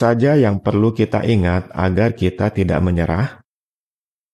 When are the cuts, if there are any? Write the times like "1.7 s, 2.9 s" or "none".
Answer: none